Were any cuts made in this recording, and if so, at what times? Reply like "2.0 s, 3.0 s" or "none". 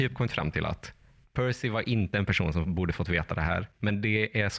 none